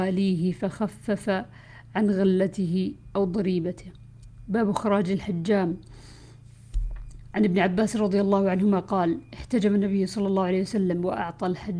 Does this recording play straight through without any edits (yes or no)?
yes